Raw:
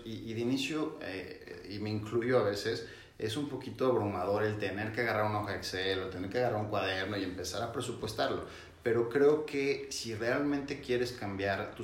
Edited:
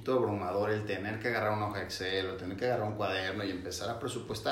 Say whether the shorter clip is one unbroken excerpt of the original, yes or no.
yes